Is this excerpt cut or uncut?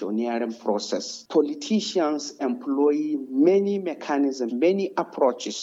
cut